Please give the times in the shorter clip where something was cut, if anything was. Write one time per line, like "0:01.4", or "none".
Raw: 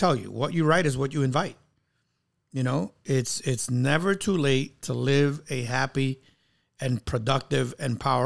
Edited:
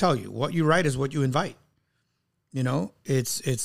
none